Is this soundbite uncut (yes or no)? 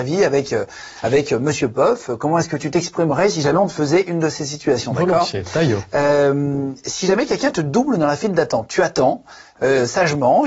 yes